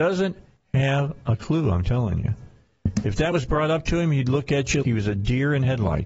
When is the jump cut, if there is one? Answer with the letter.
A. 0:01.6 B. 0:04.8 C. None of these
B